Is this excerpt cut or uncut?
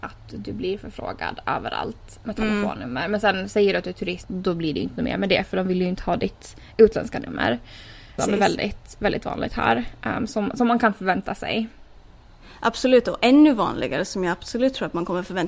cut